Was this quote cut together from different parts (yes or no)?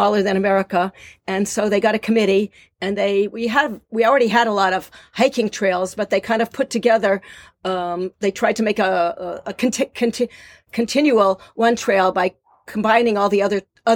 no